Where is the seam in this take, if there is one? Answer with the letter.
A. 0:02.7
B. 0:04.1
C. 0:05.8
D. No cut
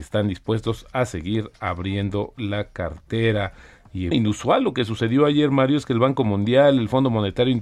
B